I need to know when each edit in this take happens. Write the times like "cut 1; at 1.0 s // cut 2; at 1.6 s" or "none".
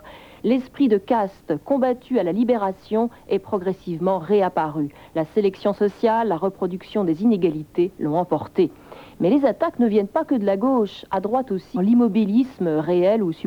cut 1; at 11.8 s